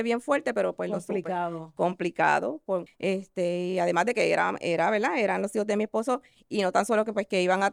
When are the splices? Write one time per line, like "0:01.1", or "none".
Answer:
0:02.9